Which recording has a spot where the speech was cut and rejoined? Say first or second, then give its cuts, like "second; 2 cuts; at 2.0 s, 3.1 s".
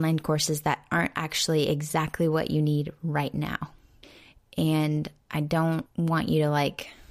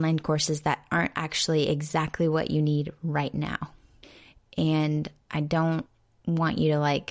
first; 1 cut; at 5.9 s